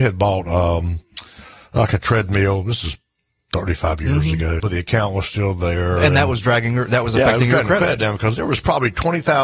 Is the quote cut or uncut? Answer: cut